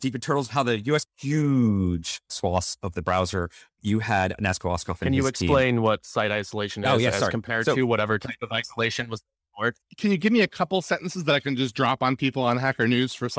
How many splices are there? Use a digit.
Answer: 2